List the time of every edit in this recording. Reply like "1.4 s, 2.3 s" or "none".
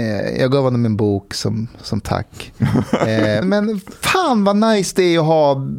3.4 s

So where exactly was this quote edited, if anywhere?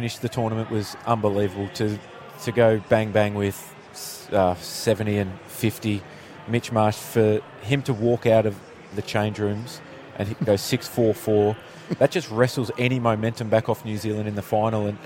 none

